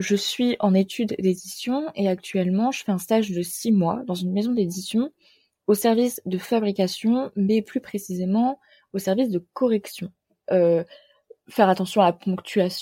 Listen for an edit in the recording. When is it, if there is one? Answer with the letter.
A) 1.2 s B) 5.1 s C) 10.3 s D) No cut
C